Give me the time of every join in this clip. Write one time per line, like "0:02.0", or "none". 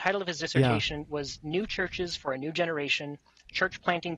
none